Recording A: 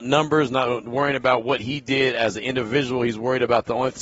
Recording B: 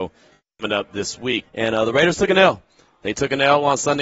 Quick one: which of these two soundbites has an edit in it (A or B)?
B